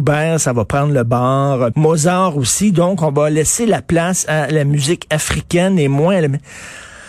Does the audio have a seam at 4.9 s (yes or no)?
no